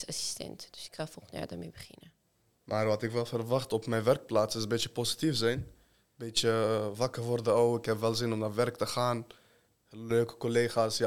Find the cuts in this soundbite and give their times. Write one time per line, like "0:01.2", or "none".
0:02.6